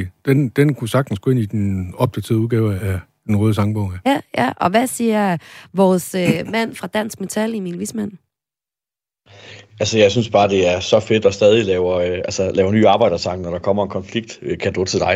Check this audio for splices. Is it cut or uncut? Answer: cut